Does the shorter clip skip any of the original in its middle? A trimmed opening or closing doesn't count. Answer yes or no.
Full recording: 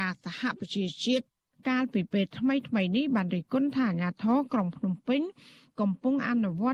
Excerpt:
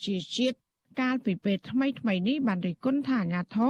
no